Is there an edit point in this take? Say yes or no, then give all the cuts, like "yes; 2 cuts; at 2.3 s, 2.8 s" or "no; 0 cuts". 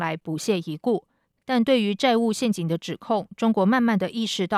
no; 0 cuts